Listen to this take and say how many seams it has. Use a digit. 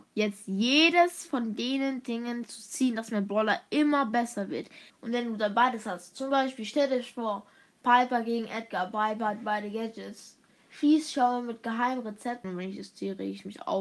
2